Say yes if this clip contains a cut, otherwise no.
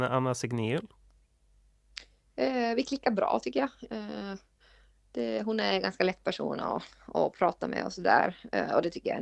no